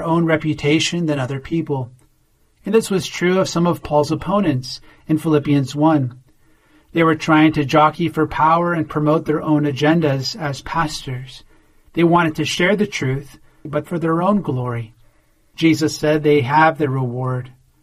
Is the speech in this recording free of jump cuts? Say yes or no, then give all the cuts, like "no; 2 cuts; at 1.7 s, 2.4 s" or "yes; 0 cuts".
no; 2 cuts; at 13.6 s, 15.5 s